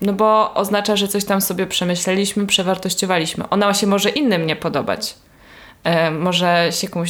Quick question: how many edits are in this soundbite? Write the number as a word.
zero